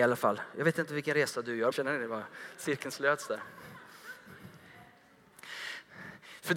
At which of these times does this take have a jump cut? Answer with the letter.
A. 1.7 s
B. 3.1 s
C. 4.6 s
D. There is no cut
A